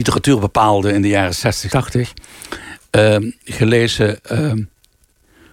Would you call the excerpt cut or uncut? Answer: cut